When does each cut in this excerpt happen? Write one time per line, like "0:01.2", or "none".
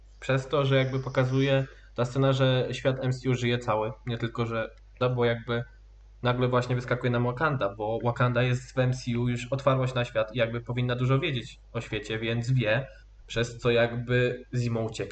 0:05.0